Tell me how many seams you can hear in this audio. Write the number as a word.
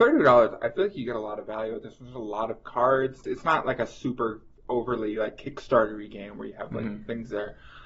one